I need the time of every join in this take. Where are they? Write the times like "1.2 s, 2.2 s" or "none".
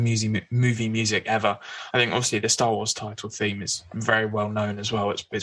none